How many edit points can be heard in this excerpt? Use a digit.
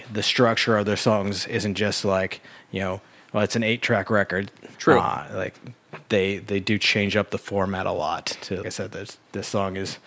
2